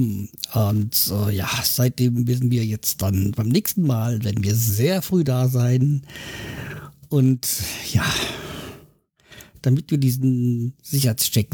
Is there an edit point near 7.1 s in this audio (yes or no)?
no